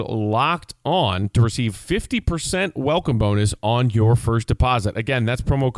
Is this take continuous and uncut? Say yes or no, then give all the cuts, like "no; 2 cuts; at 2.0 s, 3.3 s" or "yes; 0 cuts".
yes; 0 cuts